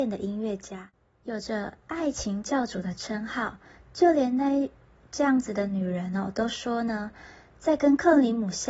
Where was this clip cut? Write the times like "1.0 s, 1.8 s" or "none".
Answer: none